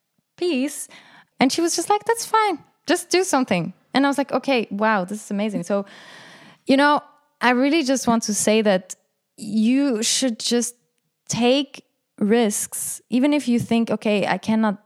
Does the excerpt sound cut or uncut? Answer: cut